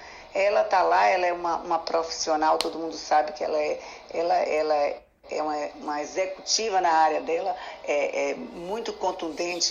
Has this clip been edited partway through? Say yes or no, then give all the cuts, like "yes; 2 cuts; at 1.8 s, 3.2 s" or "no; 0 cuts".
no; 0 cuts